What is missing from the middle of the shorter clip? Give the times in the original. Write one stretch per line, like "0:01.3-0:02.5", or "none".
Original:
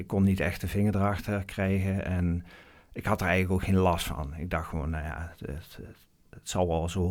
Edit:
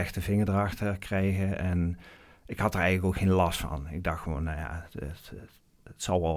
none